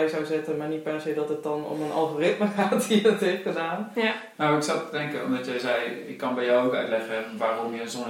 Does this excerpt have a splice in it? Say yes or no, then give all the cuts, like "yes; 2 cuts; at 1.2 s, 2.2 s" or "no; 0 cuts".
yes; 1 cut; at 4.3 s